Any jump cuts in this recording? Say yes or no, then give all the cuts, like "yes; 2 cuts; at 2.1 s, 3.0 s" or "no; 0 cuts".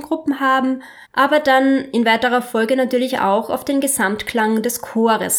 yes; 1 cut; at 1.0 s